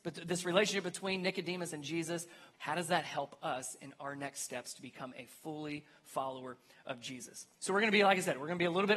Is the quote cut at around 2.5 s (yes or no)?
yes